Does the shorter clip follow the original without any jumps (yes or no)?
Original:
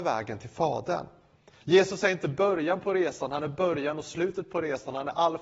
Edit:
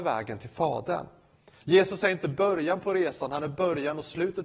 yes